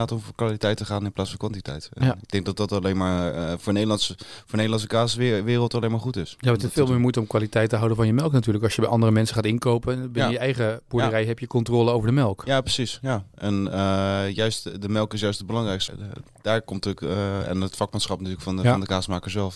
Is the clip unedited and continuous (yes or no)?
no